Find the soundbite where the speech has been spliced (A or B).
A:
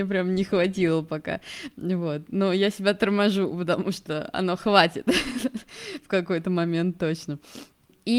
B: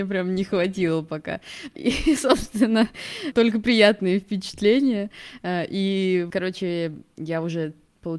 B